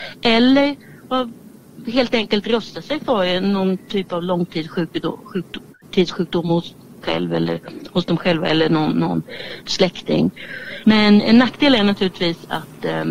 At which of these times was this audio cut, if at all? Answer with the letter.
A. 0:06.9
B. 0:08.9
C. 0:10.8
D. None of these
C